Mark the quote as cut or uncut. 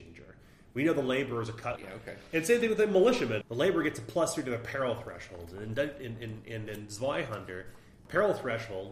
cut